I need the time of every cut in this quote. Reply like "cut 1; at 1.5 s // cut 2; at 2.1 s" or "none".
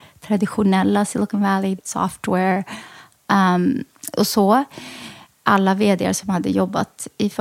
cut 1; at 1.8 s